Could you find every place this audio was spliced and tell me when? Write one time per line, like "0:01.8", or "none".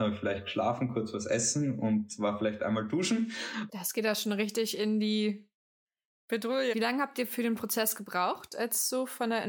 0:03.7
0:06.7